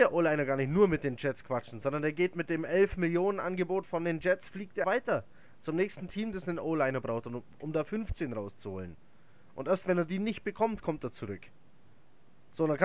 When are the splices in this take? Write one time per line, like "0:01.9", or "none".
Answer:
0:04.8